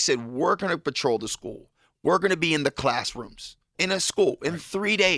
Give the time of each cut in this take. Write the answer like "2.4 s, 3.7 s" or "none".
3.8 s